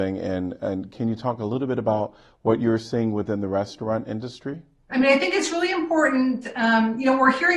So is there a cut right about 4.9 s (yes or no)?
yes